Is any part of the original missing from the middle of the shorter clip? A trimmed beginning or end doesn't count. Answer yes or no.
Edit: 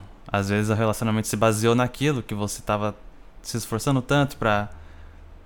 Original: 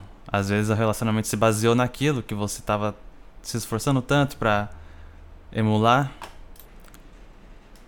no